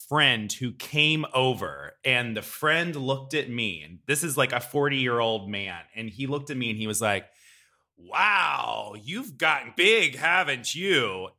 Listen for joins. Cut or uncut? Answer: cut